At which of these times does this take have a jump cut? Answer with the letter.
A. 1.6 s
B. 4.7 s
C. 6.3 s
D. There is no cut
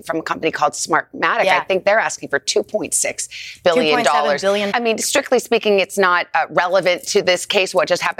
B